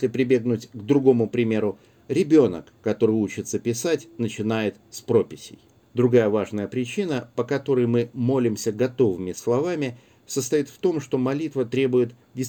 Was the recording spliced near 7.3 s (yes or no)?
no